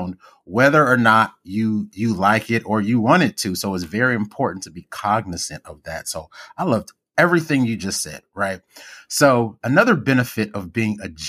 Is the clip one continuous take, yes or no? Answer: yes